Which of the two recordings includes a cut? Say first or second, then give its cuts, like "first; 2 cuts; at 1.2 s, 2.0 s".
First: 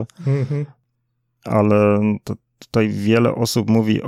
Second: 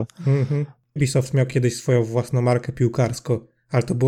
second; 1 cut; at 1.0 s